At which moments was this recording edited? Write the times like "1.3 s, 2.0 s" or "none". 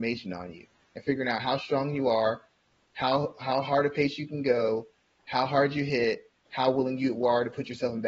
none